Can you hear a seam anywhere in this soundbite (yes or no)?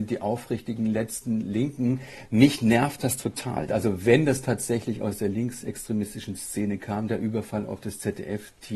yes